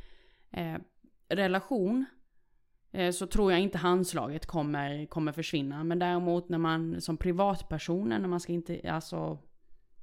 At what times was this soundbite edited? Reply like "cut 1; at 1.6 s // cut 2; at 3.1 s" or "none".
none